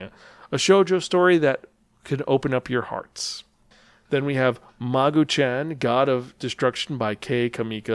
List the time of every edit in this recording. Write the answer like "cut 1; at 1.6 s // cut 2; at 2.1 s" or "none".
none